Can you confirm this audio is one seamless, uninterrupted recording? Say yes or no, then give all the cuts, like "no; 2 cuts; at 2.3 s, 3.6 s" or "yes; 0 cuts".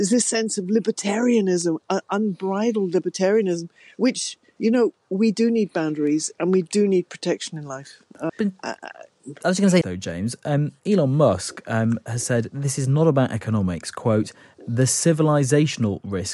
no; 2 cuts; at 8.3 s, 9.8 s